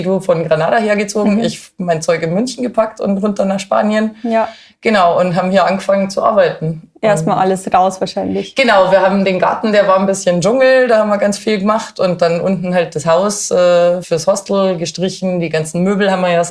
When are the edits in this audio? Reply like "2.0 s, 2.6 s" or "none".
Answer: 14.0 s